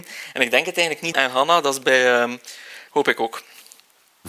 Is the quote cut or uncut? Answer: cut